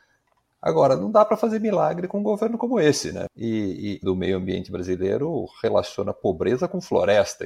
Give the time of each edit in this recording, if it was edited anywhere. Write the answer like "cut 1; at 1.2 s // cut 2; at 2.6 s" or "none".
cut 1; at 4.0 s